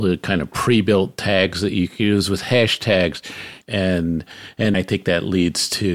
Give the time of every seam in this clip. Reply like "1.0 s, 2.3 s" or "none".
3.6 s, 4.7 s